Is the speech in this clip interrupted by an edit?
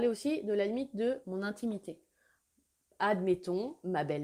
no; 0 cuts

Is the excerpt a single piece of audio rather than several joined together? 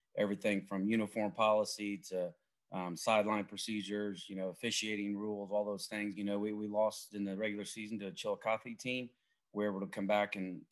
no; 1 cut; at 6.2 s

